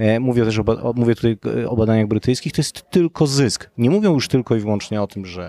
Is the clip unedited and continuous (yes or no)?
no